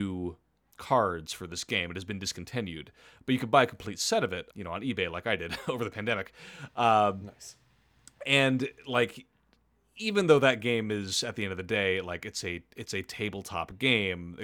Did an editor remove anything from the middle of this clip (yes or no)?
yes